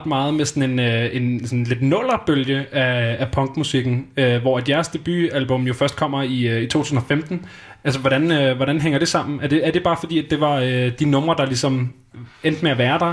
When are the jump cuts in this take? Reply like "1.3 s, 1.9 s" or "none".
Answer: none